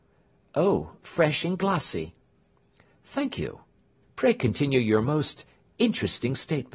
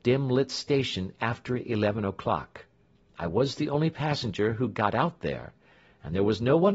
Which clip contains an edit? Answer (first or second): first